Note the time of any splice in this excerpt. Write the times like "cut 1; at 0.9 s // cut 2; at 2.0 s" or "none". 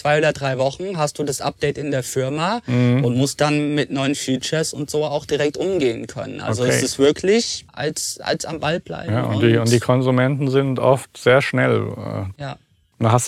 cut 1; at 7.7 s // cut 2; at 12.3 s